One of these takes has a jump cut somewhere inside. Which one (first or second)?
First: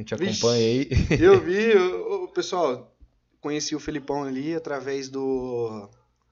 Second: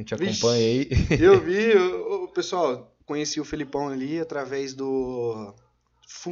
second